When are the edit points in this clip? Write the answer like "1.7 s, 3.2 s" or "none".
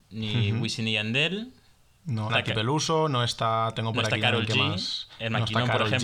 2.3 s